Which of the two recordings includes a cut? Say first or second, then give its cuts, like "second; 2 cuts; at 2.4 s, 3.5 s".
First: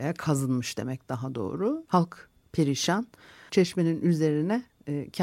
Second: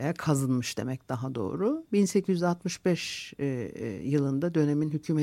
first; 2 cuts; at 1.9 s, 3.5 s